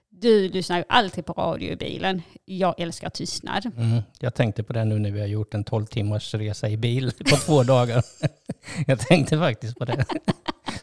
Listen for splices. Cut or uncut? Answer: uncut